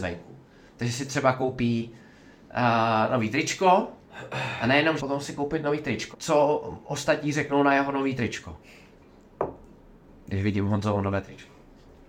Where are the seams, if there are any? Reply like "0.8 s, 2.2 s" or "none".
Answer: 5.0 s, 6.1 s